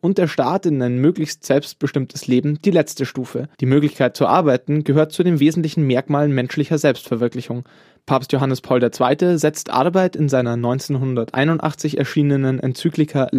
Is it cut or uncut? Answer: cut